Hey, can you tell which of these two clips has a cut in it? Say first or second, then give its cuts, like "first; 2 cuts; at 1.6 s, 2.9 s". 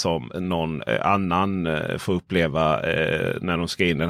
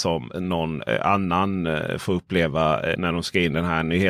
second; 1 cut; at 2.9 s